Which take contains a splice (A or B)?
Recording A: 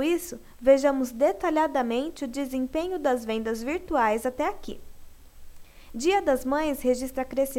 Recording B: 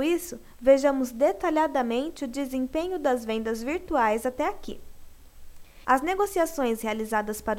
B